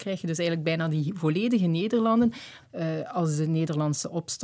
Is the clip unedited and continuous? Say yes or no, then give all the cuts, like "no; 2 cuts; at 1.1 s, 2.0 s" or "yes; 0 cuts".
no; 1 cut; at 2.6 s